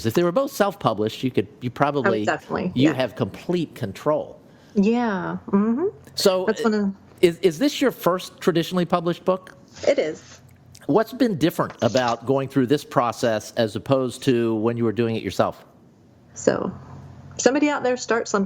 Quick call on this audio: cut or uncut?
cut